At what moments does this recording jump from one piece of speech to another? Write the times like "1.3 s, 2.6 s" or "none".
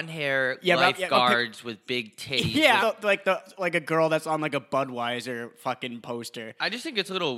2.8 s